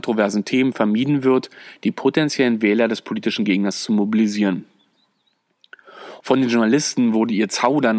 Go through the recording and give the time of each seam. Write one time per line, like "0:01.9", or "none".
0:06.2